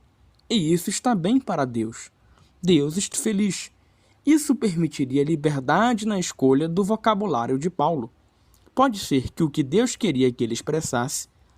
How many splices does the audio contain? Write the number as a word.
one